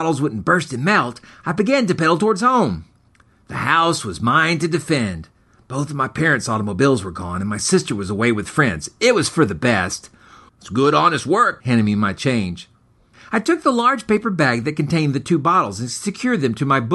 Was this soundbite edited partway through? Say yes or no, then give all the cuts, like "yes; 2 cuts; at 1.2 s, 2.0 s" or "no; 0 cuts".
yes; 2 cuts; at 10.5 s, 11.6 s